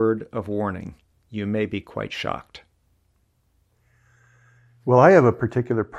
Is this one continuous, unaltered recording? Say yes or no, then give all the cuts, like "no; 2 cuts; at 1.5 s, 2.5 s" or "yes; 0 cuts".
yes; 0 cuts